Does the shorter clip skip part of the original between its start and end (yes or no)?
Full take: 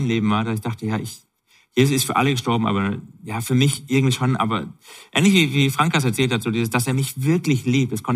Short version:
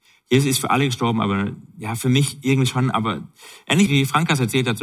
yes